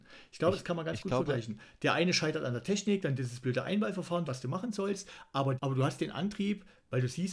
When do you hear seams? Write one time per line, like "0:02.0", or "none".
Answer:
0:04.3
0:05.6

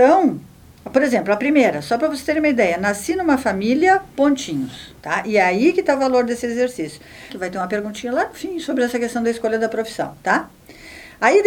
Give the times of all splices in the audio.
0:05.0
0:07.3

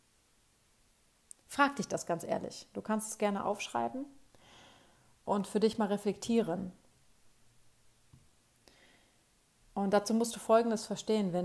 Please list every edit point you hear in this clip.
none

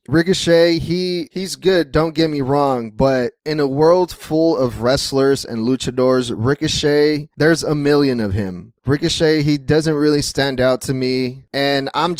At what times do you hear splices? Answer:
none

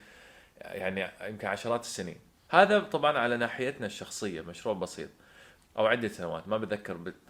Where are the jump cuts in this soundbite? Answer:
0:02.5
0:05.6

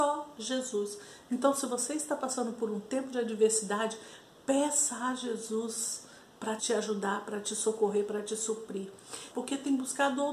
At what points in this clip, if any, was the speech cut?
0:06.6
0:09.3

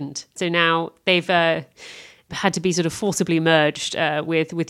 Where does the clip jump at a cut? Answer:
none

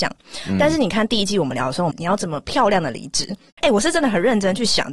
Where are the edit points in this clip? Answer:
0:01.9
0:03.6

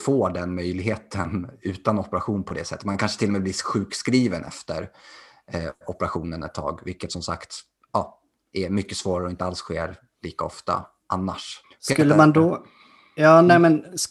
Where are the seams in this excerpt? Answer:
0:11.6

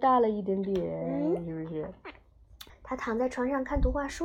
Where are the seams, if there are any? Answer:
0:02.7

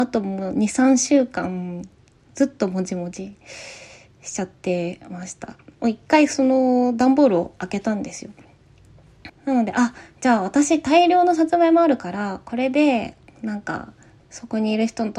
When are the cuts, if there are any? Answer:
0:05.8
0:09.3
0:14.2

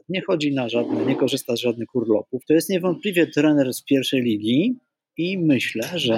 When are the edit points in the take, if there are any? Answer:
0:02.4

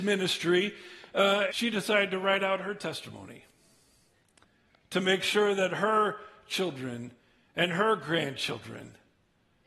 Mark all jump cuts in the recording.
0:01.5

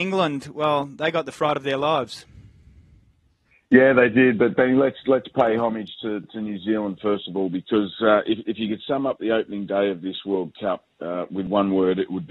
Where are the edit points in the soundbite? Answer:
none

